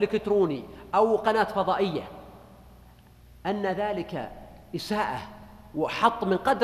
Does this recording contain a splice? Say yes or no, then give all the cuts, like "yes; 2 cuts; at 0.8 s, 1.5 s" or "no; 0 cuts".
no; 0 cuts